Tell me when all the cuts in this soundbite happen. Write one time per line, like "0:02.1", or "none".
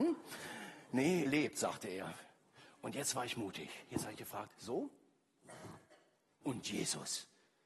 0:01.2
0:06.4